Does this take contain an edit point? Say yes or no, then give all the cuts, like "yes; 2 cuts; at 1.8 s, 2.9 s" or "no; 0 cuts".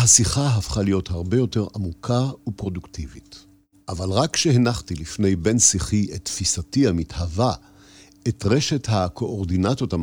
yes; 1 cut; at 3.7 s